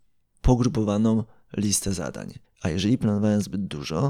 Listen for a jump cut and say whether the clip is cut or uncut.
cut